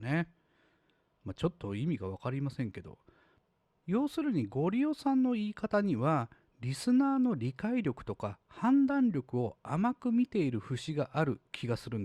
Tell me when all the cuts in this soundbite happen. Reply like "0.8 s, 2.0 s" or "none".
none